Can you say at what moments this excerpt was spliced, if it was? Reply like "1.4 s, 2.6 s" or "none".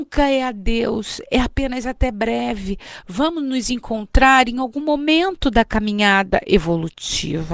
none